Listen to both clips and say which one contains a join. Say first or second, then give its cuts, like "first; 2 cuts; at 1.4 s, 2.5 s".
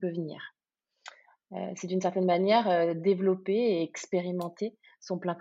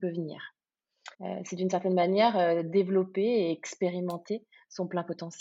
second; 1 cut; at 1.1 s